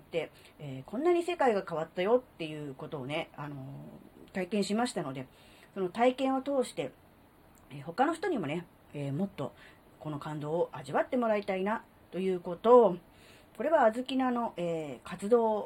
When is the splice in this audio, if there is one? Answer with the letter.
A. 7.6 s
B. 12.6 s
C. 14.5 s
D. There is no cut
B